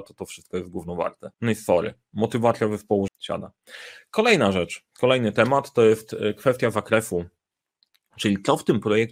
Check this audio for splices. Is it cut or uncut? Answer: cut